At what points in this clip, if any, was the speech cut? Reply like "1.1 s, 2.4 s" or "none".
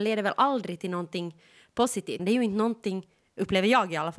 2.2 s